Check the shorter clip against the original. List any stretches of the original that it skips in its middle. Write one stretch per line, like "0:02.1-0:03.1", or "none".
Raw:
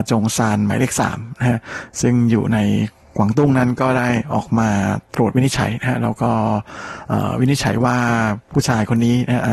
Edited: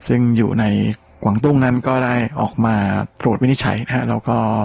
none